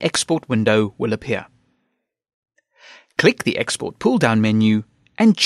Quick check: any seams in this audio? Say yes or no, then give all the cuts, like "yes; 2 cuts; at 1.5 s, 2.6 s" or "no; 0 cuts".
no; 0 cuts